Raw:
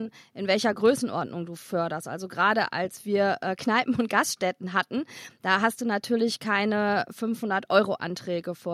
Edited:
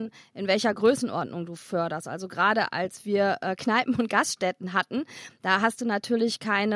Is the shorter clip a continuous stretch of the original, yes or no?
yes